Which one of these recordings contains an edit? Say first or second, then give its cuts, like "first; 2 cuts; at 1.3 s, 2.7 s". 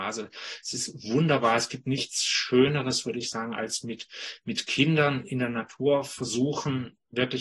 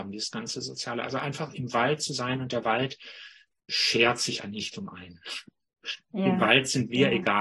second; 1 cut; at 4.4 s